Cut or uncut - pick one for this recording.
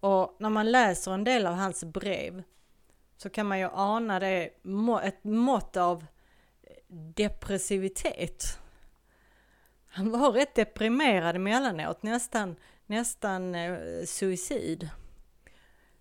uncut